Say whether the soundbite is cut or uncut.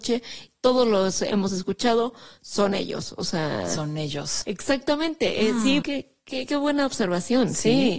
cut